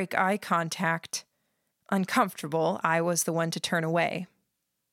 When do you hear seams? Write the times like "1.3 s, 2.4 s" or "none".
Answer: 1.7 s

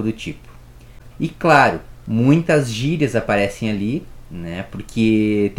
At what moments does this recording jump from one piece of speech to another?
1.1 s

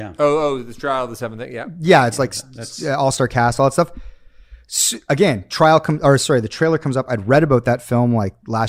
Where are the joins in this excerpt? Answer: none

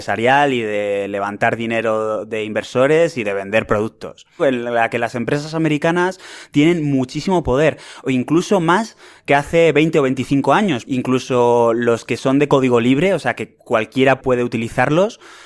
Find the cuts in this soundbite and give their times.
4.4 s, 10.8 s

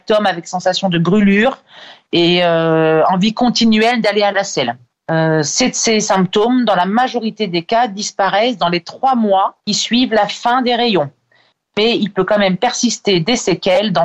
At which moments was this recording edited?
9.6 s

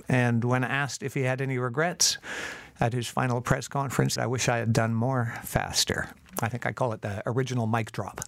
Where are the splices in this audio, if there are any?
4.2 s

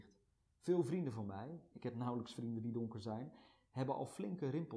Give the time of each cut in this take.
1.7 s

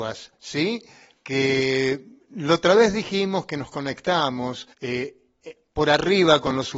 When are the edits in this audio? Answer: 4.7 s

